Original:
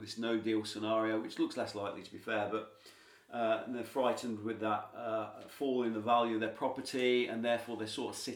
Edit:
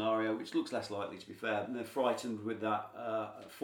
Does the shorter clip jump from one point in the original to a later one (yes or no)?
yes